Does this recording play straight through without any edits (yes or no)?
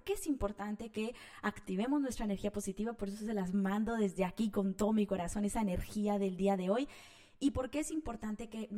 yes